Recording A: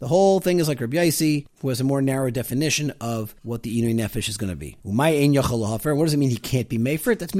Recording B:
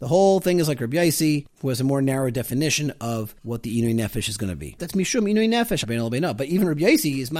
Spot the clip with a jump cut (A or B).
B